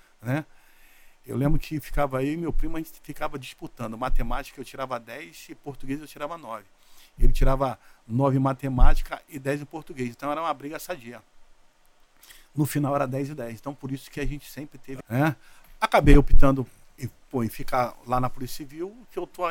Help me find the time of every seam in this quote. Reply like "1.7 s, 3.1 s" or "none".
15.0 s